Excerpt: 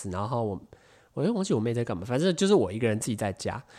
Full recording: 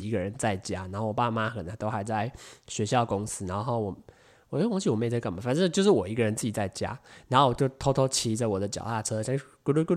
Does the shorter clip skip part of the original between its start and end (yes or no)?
no